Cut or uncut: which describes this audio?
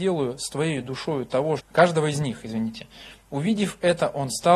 cut